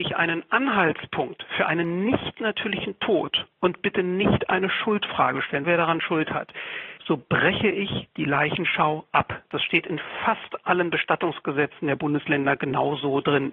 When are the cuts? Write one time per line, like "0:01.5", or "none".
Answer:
0:05.6
0:07.0